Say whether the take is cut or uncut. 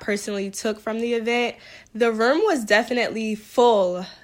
cut